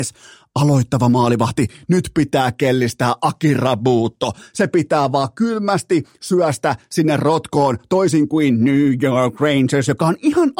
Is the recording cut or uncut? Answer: uncut